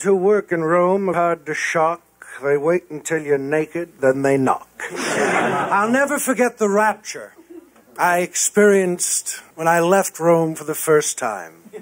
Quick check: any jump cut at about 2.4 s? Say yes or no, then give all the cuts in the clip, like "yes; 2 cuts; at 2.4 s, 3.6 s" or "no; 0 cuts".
no; 3 cuts; at 1.1 s, 4.0 s, 9.5 s